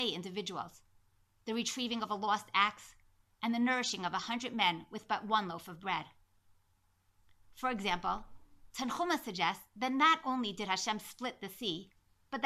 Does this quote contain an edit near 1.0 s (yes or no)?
no